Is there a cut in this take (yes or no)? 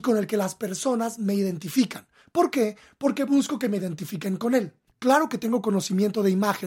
yes